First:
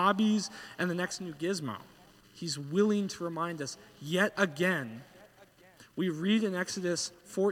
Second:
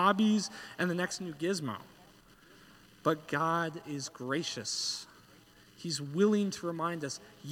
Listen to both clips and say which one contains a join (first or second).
first